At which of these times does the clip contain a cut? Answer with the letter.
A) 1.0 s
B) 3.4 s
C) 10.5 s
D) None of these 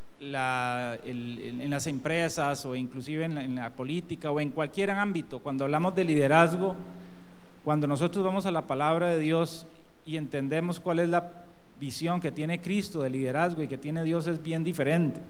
D